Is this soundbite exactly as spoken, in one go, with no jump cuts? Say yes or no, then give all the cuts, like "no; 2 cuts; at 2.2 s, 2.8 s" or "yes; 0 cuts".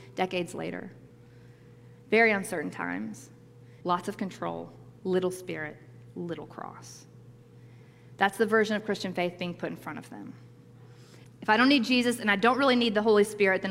no; 2 cuts; at 3.8 s, 11.2 s